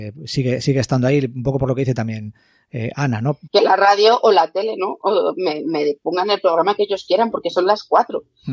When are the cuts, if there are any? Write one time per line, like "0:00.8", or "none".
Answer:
0:03.5